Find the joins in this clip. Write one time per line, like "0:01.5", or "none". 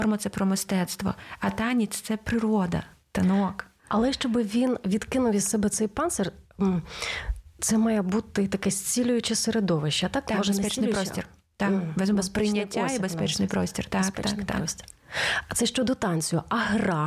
none